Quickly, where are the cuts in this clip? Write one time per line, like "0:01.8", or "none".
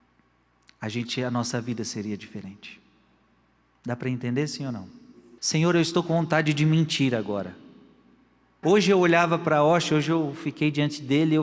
0:05.4
0:08.6